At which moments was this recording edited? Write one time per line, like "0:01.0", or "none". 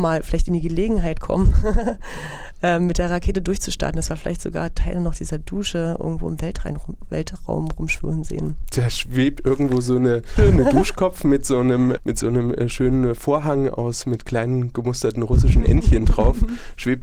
0:10.4
0:12.0